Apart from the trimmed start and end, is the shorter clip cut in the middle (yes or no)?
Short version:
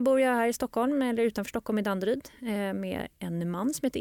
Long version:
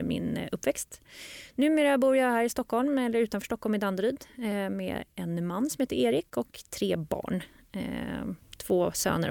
no